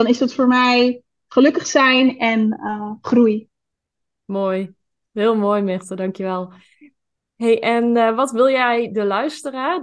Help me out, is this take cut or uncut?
uncut